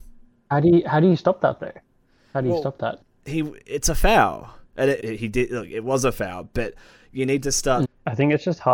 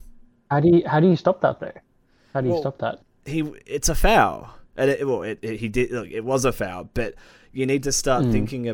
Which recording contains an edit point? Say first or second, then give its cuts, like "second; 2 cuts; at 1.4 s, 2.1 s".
first; 2 cuts; at 5.0 s, 7.8 s